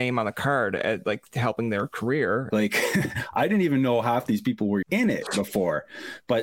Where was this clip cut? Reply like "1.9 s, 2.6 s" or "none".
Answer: 2.5 s, 4.8 s

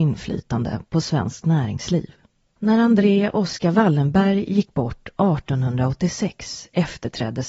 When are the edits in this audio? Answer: none

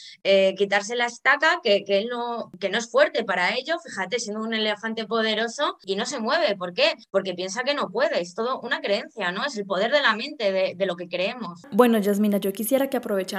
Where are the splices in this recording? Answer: none

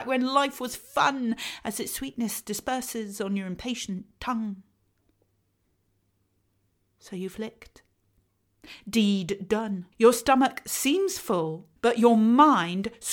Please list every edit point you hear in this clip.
9.9 s, 11.8 s

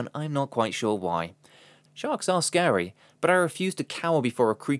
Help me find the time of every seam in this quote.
1.9 s

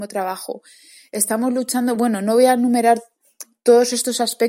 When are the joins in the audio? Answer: none

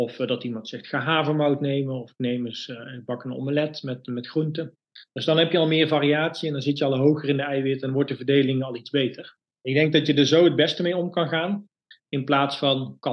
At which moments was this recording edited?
9.5 s

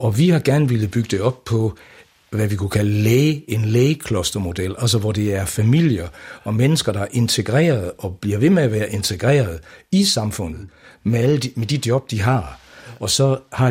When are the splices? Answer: none

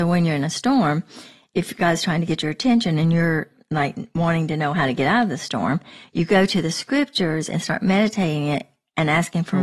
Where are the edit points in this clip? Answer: none

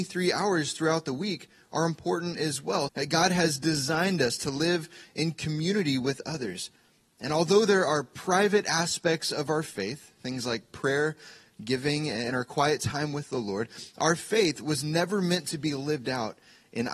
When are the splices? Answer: 2.9 s

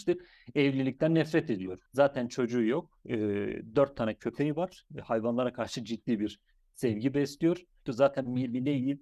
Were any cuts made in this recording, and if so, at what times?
1.9 s, 7.9 s

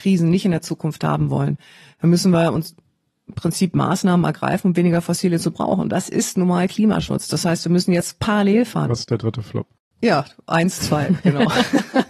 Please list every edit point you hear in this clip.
8.8 s

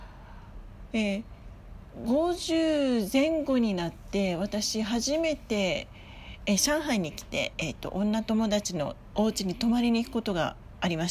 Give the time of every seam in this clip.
none

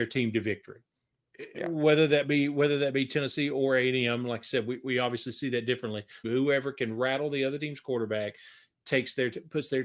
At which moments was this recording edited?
6.2 s

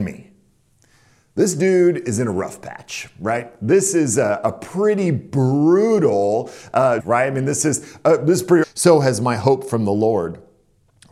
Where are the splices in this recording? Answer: 7.0 s, 8.6 s

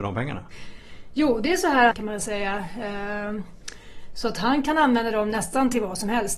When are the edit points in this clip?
1.9 s

